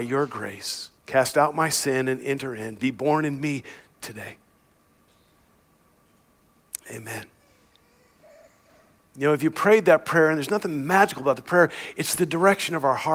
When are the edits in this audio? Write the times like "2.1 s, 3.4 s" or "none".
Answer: 1.0 s